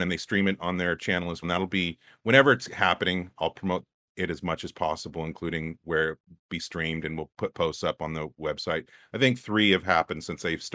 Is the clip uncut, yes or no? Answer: no